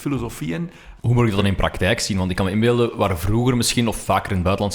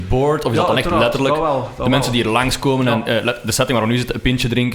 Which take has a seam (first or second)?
first